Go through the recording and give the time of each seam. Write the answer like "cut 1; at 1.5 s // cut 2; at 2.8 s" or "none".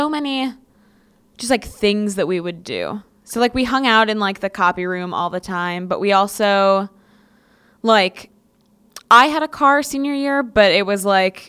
none